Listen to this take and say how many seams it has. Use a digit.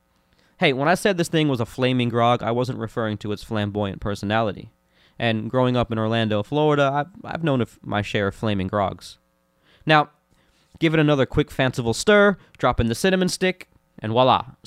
0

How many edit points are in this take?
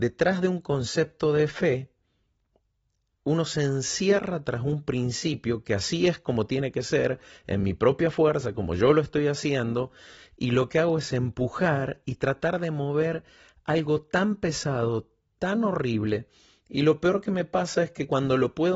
0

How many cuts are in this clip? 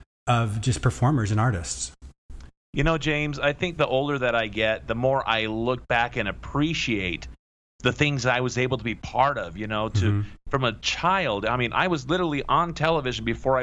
0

